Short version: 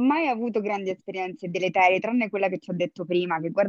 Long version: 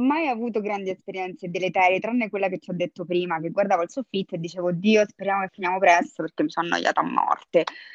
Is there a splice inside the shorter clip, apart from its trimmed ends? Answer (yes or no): no